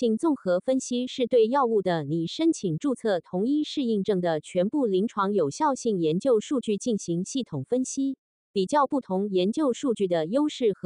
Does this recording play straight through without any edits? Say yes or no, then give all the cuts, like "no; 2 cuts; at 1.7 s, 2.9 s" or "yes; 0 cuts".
yes; 0 cuts